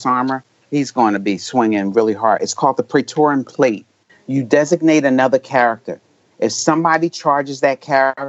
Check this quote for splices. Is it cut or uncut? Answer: cut